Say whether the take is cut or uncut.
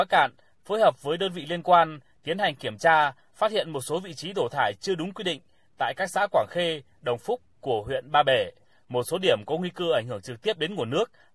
uncut